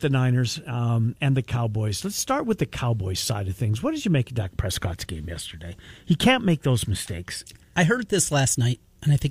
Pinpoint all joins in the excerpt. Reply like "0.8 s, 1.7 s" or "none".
1.2 s